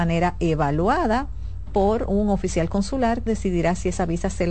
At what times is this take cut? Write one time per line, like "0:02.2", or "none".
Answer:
0:03.3